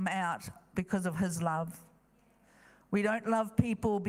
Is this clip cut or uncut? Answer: uncut